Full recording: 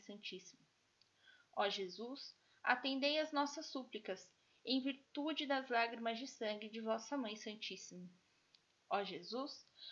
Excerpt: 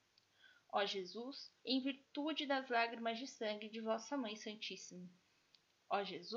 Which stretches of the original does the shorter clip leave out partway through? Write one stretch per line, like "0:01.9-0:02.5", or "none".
0:02.4-0:04.6